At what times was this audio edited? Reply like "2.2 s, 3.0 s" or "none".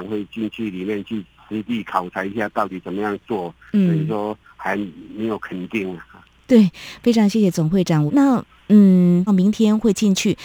8.1 s, 9.3 s